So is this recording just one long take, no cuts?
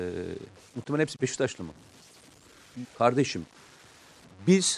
no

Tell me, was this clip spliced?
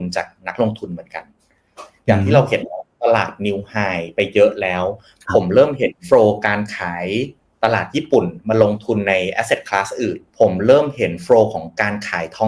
yes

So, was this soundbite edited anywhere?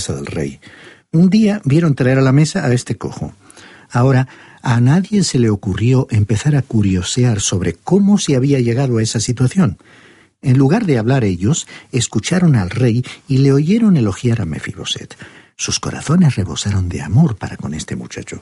no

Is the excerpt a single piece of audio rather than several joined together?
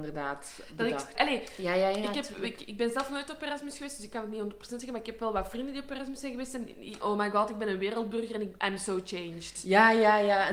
no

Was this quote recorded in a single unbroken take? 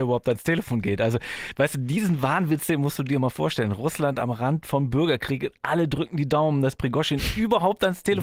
yes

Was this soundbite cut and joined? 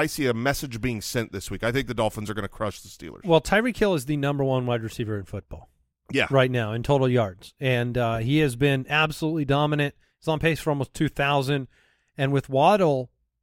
no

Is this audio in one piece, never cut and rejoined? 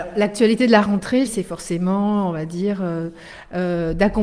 no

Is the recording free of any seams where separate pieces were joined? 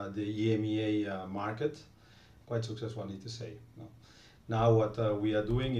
no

